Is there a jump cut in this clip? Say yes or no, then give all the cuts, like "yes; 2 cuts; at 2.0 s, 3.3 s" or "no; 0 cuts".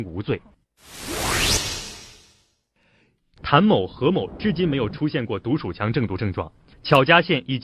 yes; 1 cut; at 3.4 s